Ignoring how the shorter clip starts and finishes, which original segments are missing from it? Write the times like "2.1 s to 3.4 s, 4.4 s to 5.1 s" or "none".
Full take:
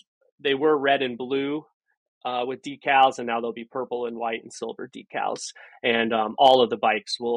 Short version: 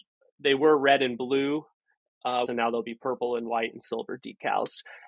2.5 s to 3.2 s